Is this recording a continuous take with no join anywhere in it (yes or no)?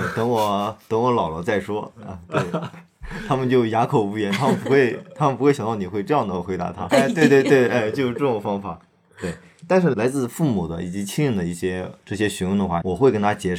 no